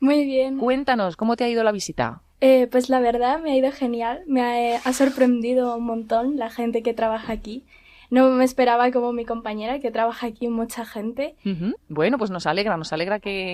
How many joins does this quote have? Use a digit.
1